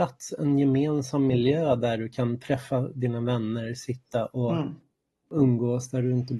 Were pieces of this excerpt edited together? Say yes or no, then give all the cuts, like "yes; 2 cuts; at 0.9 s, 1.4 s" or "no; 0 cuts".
no; 0 cuts